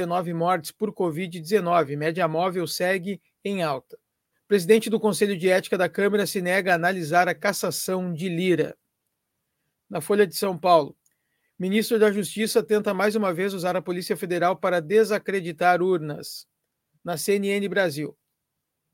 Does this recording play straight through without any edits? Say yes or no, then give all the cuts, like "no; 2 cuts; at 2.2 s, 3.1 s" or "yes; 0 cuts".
no; 3 cuts; at 4.3 s, 9.7 s, 16.9 s